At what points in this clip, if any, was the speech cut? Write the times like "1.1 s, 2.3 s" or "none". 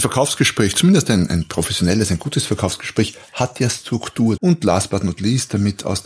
4.4 s